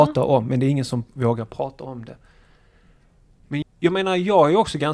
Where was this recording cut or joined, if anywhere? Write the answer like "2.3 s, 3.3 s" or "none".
3.6 s

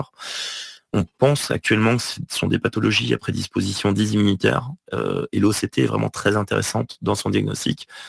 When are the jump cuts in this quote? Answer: 0.9 s

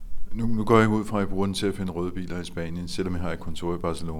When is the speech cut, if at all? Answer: none

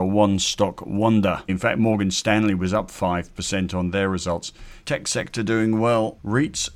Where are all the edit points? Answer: 1.5 s, 4.8 s

